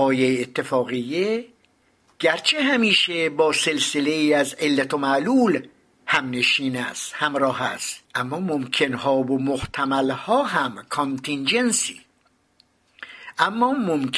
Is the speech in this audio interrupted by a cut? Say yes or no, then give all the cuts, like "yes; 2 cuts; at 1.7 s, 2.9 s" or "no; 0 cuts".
yes; 1 cut; at 8.0 s